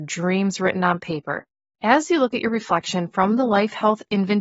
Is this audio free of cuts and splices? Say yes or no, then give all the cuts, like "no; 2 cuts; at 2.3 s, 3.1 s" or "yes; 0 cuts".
no; 1 cut; at 1.7 s